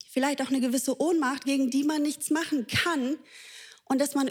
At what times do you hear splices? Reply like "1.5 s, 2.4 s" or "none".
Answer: 1.4 s